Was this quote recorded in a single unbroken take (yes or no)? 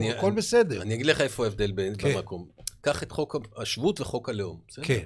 yes